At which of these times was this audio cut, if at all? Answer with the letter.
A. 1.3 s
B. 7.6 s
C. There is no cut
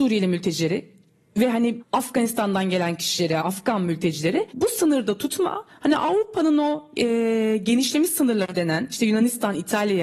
C